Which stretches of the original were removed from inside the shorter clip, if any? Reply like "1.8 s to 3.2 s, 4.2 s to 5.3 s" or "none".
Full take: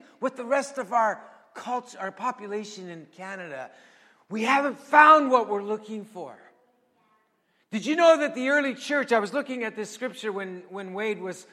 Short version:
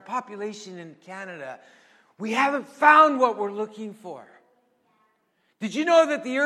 none